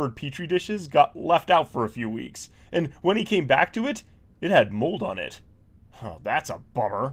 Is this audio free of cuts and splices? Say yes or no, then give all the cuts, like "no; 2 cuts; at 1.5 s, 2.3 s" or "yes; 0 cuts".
yes; 0 cuts